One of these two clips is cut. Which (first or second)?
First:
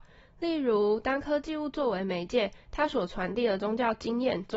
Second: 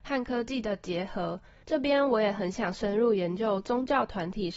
second